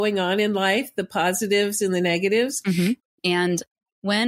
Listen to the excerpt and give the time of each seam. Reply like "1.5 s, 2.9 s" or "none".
3.0 s